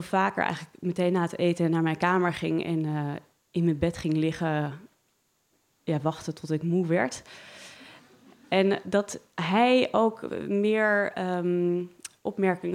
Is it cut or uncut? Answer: uncut